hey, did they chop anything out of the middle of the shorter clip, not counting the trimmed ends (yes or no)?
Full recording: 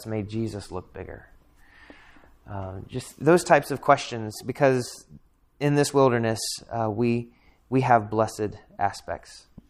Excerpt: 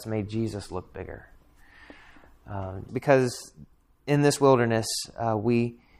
yes